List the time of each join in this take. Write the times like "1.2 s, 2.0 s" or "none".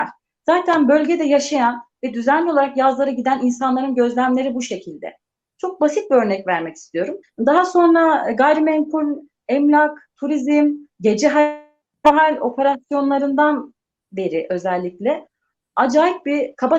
7.2 s